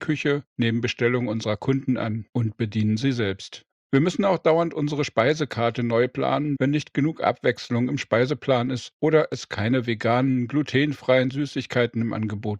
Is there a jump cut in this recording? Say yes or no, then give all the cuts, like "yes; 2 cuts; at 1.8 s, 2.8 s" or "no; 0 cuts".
yes; 2 cuts; at 3.7 s, 6.6 s